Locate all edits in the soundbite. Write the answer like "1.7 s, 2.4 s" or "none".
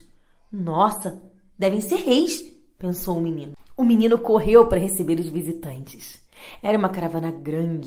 6.6 s